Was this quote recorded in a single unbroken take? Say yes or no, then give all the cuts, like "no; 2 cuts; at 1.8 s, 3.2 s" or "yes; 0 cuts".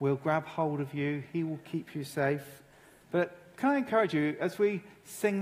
no; 1 cut; at 3.0 s